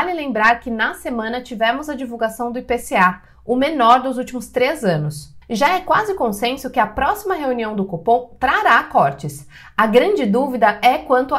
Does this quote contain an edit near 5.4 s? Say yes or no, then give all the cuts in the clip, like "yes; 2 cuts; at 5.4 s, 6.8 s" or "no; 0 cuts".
yes; 1 cut; at 5.4 s